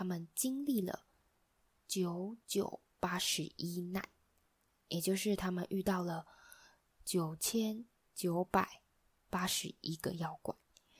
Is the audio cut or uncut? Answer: uncut